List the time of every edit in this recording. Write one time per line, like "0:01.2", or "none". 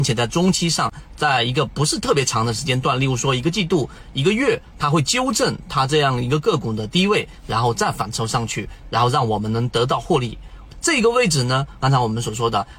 0:10.7
0:11.8